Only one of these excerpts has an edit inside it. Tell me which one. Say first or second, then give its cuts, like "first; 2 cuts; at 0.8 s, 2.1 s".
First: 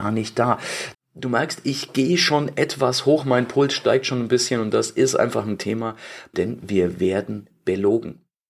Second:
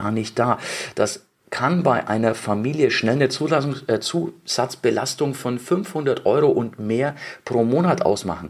first; 2 cuts; at 0.9 s, 6.3 s